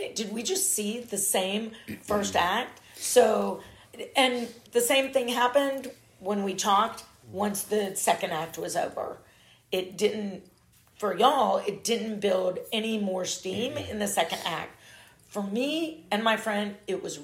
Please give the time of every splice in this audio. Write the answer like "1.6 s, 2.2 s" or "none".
4.7 s